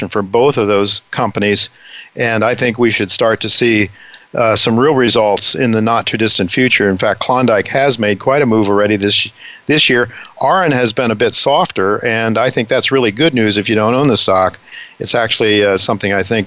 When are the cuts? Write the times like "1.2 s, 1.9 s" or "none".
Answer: none